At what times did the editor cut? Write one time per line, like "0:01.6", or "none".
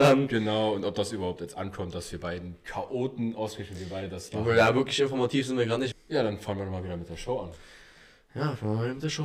0:05.9